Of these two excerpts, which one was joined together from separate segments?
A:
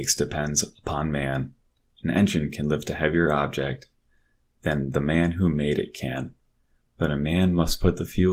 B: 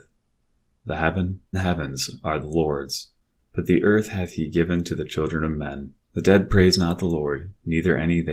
B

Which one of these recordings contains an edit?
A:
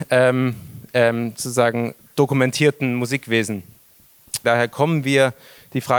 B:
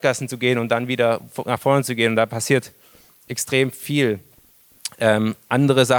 A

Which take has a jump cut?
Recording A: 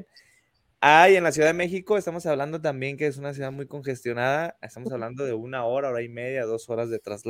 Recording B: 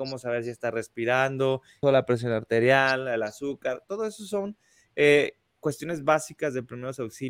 B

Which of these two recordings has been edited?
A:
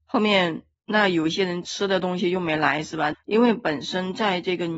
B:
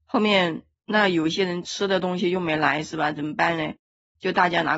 A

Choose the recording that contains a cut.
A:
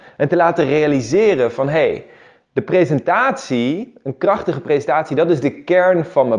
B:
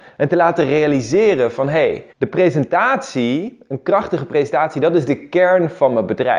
B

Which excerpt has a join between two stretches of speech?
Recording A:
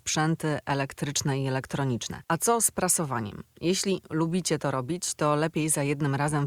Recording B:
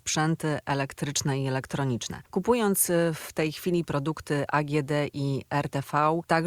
A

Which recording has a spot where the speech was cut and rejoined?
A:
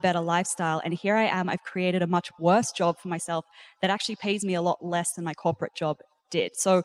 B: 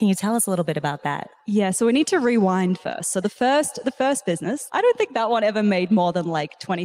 B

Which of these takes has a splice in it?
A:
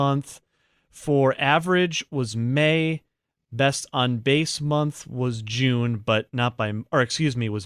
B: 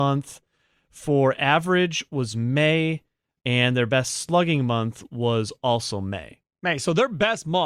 B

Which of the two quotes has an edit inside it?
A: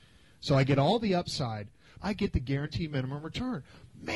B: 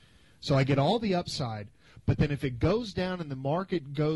A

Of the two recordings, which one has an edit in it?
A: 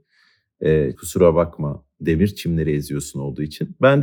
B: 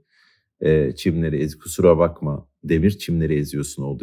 A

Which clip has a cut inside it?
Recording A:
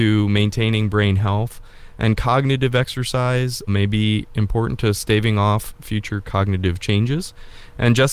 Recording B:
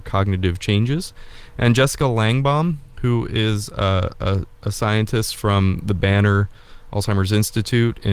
A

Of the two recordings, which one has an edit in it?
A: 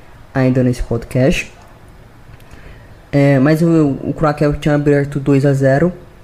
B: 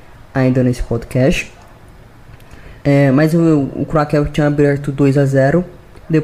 B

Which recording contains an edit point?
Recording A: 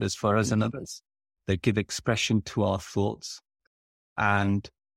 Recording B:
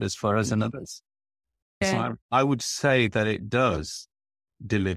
A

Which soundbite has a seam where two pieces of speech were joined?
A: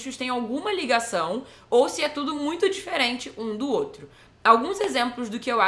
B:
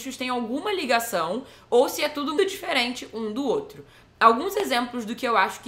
B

